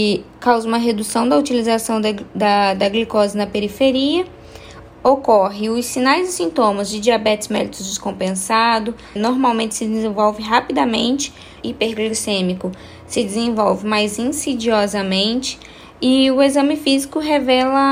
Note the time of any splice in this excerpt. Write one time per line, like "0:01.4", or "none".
0:04.9
0:09.2
0:11.6